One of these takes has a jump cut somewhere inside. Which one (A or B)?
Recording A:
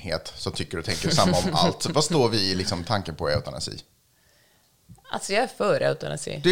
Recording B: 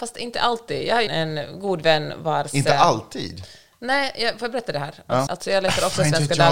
B